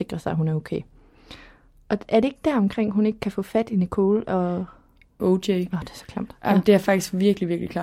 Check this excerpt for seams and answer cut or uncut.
cut